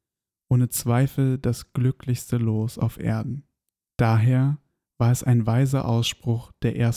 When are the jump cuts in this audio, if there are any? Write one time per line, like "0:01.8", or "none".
0:03.9